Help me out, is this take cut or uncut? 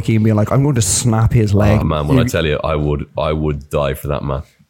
cut